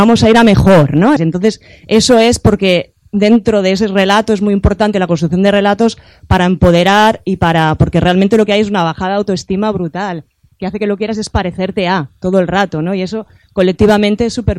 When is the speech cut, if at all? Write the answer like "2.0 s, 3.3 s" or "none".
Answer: 1.2 s